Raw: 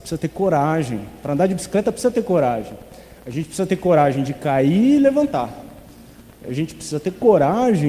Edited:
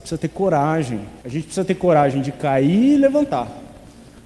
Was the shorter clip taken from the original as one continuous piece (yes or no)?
no